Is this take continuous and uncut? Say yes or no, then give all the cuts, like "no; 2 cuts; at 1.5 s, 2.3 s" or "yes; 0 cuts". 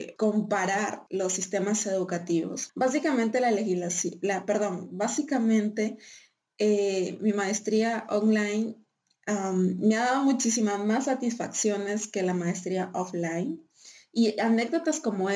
no; 1 cut; at 2.7 s